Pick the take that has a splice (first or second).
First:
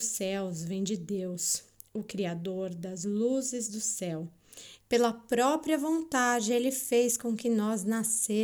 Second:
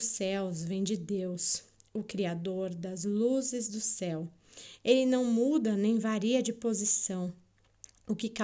first